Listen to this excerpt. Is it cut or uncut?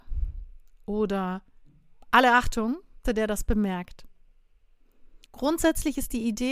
cut